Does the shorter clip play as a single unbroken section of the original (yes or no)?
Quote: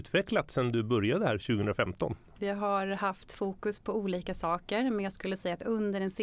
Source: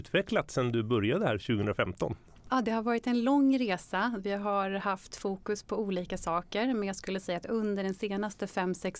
no